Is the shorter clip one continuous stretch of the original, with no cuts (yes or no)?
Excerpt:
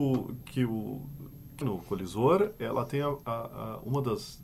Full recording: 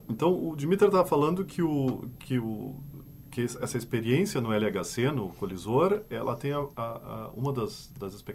no